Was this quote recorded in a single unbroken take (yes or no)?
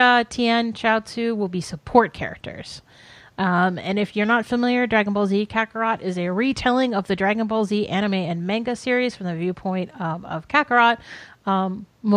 yes